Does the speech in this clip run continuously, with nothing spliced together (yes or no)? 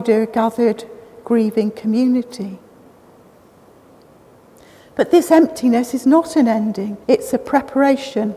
no